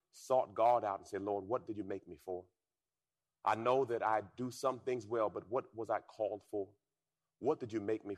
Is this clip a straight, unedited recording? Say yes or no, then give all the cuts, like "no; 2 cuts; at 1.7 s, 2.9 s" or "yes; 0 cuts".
yes; 0 cuts